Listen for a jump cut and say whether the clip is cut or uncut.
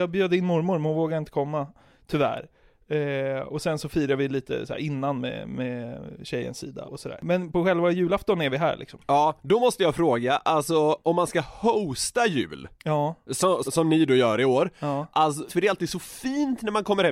cut